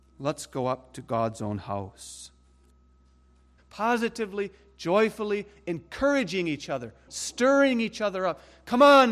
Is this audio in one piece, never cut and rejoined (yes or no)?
no